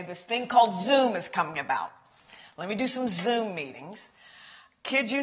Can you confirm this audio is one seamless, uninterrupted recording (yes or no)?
yes